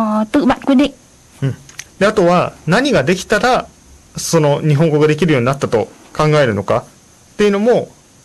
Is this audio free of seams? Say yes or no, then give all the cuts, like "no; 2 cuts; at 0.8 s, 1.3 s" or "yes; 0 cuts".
no; 1 cut; at 1.9 s